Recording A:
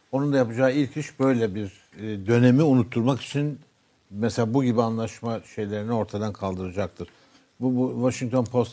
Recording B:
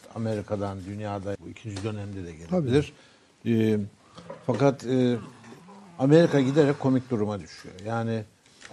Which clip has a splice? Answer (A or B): B